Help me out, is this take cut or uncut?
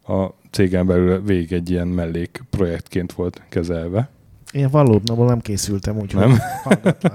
uncut